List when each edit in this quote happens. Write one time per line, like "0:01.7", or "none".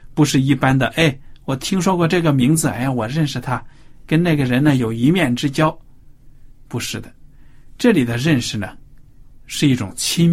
none